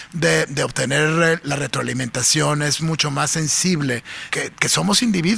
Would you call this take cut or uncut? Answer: cut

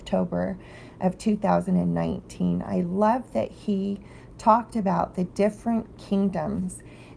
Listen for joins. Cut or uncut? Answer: uncut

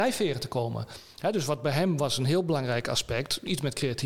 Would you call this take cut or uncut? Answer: uncut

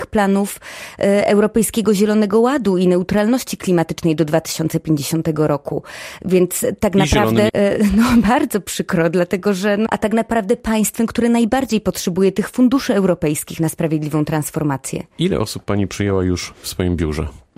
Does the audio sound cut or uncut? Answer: cut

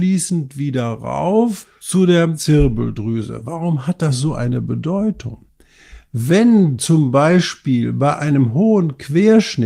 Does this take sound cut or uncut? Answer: uncut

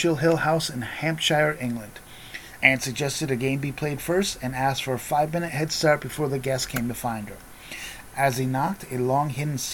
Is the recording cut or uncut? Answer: cut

